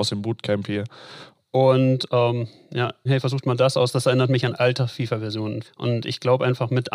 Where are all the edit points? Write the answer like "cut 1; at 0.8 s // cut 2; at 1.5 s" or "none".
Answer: cut 1; at 1.3 s // cut 2; at 3.1 s // cut 3; at 5.6 s